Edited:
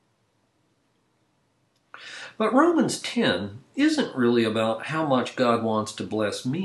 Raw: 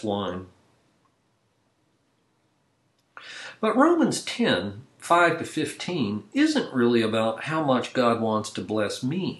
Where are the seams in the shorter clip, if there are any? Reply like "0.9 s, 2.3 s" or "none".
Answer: 3.7 s